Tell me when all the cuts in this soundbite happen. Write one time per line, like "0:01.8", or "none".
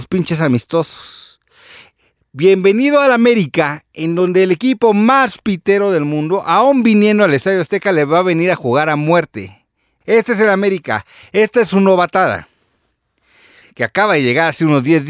0:10.0
0:13.6